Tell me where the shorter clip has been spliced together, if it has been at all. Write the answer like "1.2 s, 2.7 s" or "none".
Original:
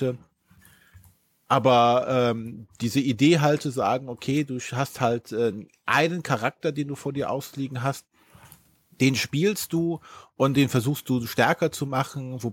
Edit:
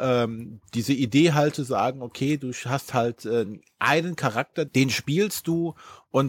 4.7 s